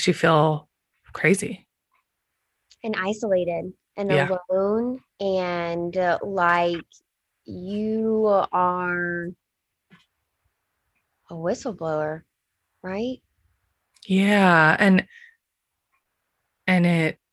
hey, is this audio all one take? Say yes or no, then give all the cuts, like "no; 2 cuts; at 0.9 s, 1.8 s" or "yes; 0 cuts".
yes; 0 cuts